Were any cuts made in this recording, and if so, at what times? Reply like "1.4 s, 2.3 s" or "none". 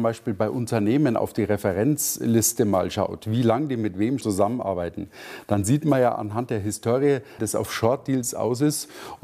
4.2 s, 7.4 s

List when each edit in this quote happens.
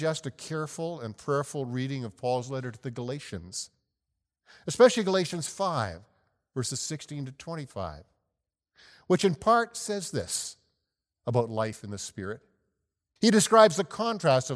13.2 s

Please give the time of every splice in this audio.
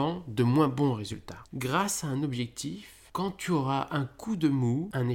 1.5 s

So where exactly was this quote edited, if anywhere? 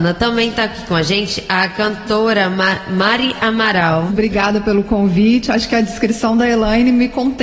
4.1 s

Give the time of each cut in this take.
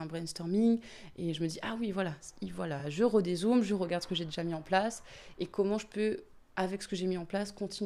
none

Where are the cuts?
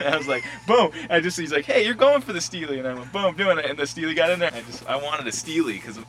4.5 s

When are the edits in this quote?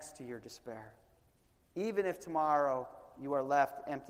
1.7 s

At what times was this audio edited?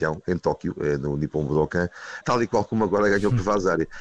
2.2 s

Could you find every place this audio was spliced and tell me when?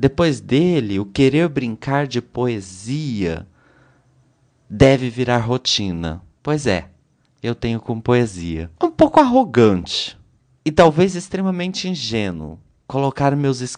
6.4 s, 8.8 s, 10.6 s

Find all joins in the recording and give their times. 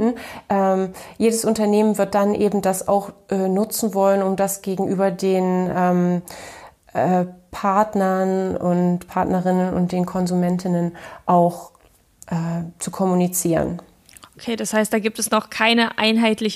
none

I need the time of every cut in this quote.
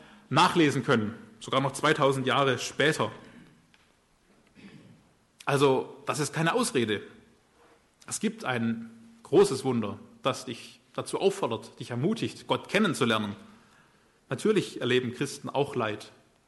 14.2 s

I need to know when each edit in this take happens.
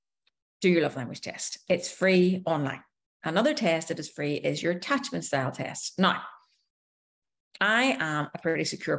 none

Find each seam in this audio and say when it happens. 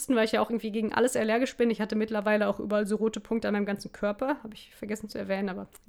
none

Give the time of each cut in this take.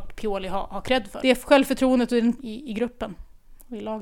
1.2 s, 2.4 s

